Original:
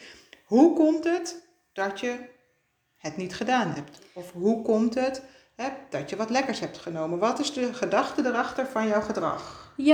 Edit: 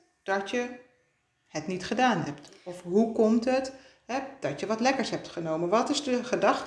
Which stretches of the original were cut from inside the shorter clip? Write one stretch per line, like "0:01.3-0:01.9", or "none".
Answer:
none